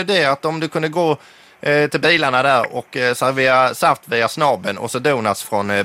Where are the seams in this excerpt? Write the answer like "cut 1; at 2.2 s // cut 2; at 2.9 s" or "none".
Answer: none